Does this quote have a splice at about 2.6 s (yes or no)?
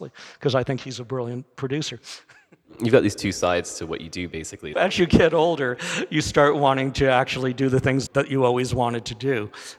no